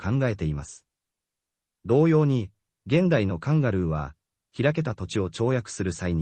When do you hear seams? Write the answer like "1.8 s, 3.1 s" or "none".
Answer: 1.6 s